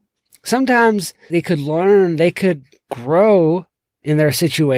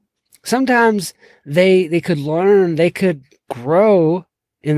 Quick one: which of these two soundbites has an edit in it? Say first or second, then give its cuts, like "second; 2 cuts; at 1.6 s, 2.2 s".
first; 1 cut; at 1.3 s